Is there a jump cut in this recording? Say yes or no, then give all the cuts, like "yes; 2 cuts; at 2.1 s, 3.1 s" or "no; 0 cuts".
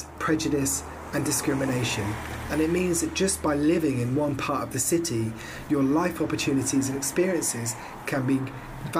no; 0 cuts